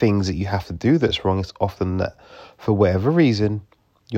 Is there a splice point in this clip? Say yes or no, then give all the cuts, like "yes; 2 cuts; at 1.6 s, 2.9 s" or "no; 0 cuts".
no; 0 cuts